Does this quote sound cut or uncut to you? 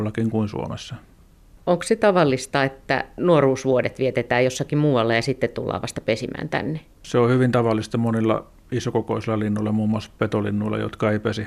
uncut